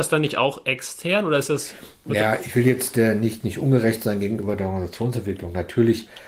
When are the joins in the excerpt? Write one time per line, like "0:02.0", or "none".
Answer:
none